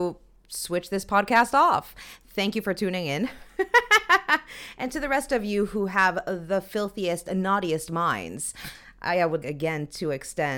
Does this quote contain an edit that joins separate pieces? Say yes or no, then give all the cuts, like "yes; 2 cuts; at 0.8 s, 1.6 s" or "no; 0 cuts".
yes; 1 cut; at 9.4 s